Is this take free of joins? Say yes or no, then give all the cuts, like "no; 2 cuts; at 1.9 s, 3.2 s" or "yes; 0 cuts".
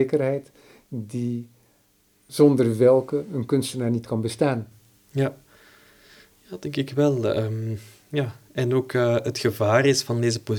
yes; 0 cuts